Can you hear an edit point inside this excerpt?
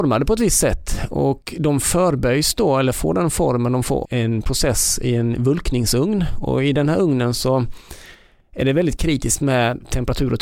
yes; 1 cut; at 4.0 s

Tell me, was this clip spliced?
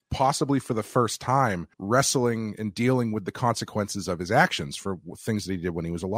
yes; 1 cut; at 1.7 s

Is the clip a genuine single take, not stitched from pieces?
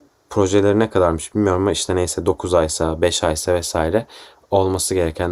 yes; 0 cuts

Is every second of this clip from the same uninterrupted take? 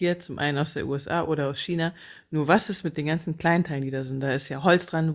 yes; 0 cuts

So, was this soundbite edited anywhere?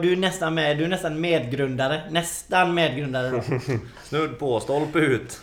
no; 0 cuts

